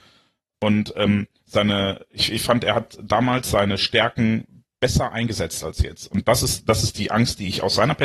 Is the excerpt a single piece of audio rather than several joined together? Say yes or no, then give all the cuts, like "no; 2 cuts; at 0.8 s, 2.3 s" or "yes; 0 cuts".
yes; 0 cuts